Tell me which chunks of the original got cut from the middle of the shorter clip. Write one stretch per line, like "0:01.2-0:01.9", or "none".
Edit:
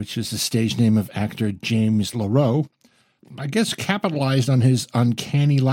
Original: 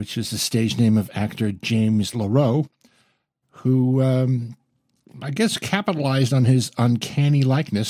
0:03.2-0:05.0